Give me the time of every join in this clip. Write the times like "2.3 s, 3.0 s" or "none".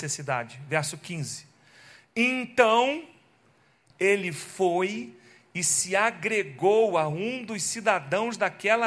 none

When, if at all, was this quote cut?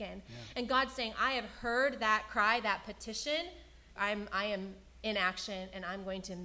4.0 s

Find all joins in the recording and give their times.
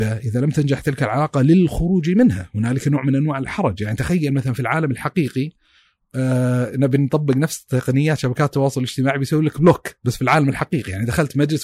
none

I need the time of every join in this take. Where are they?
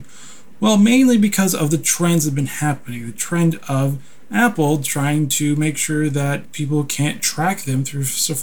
6.4 s

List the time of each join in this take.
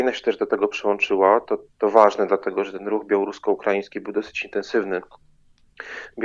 none

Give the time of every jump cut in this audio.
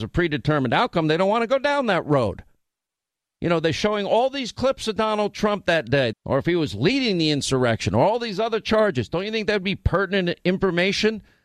6.1 s

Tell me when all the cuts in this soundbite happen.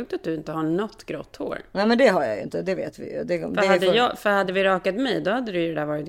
none

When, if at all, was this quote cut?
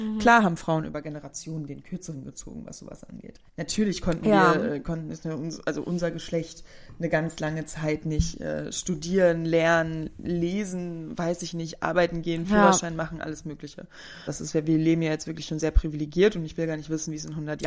3.5 s, 14.3 s

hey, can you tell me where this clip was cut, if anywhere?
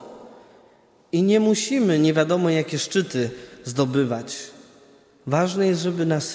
none

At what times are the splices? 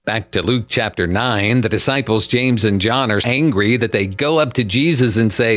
3.2 s

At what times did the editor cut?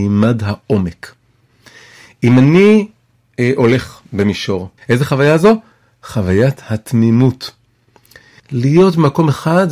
4.8 s, 8.4 s

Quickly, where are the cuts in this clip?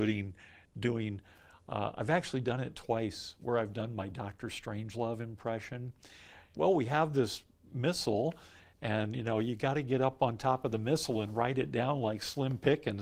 6.5 s

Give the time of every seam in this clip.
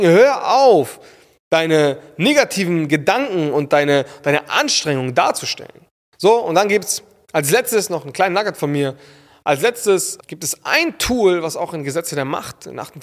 6.0 s

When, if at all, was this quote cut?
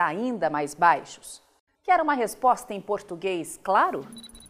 1.8 s

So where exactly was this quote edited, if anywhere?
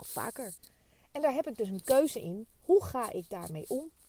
none

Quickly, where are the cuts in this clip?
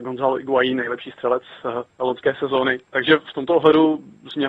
2.9 s

